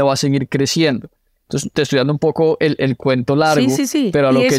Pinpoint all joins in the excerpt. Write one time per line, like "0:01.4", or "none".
none